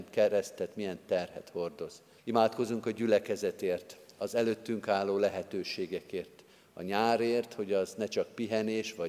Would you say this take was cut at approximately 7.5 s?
no; 1 cut; at 2.2 s

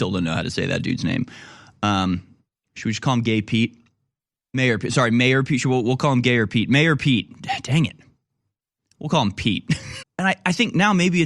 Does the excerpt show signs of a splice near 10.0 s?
yes; 1 cut; at 10.0 s

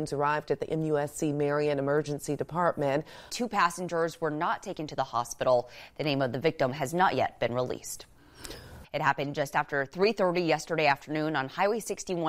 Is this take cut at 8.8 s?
yes; 2 cuts; at 3.3 s, 8.8 s

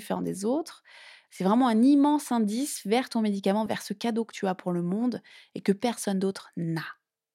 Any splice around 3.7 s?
yes; 2 cuts; at 1.3 s, 3.7 s

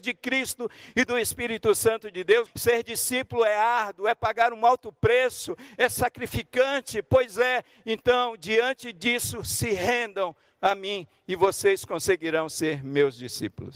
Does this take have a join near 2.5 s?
yes; 1 cut; at 2.5 s

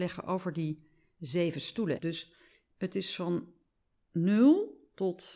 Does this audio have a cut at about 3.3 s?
no; 1 cut; at 2.0 s

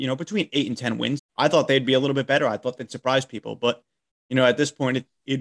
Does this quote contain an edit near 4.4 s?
no; 1 cut; at 1.2 s

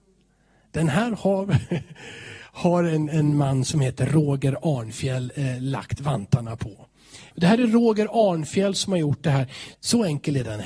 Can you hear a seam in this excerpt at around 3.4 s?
no; 2 cuts; at 7.3 s, 9.7 s

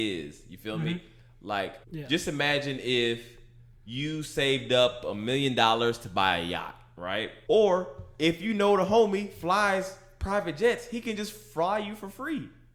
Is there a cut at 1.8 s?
yes; 2 cuts; at 1.8 s, 7.5 s

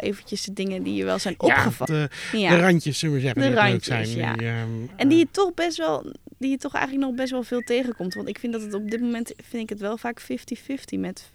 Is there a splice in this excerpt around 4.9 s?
no; 1 cut; at 1.9 s

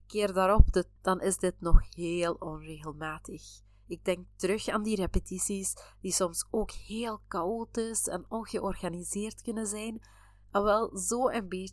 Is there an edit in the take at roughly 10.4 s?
no; 1 cut; at 1.0 s

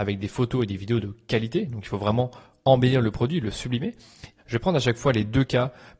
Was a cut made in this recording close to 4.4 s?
yes; 1 cut; at 4.4 s

